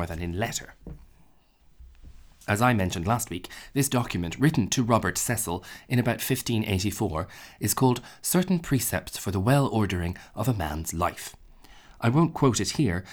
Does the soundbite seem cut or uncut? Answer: uncut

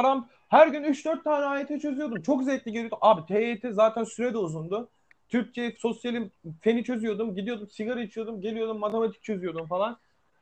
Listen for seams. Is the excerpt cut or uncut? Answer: uncut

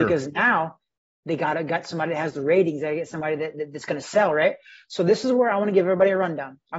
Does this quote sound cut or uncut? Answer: uncut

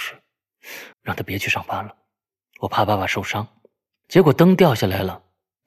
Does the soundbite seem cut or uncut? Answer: cut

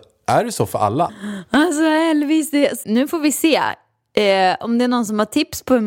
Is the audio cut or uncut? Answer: cut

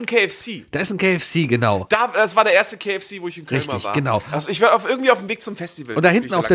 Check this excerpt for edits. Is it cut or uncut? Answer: uncut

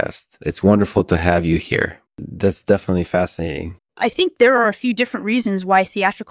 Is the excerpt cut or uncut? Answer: cut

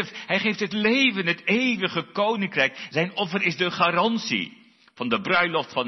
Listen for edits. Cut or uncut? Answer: cut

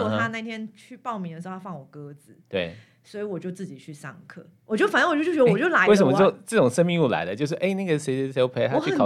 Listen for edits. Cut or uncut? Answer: uncut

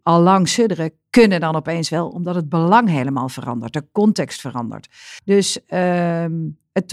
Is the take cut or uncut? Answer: cut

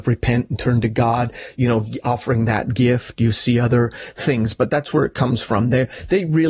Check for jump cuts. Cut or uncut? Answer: uncut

